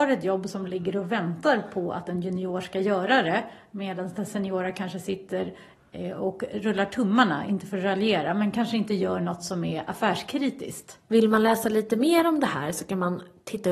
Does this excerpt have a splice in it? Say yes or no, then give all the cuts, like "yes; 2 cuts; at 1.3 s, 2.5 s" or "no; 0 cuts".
yes; 1 cut; at 11.1 s